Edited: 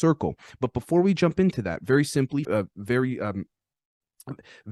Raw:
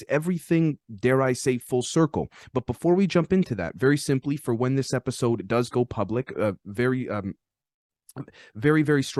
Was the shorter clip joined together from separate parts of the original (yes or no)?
yes